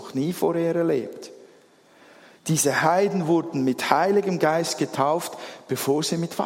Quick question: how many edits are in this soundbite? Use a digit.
0